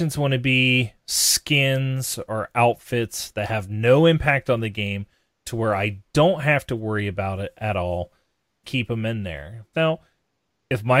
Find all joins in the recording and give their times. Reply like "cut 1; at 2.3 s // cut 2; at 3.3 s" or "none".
cut 1; at 8.6 s // cut 2; at 9.7 s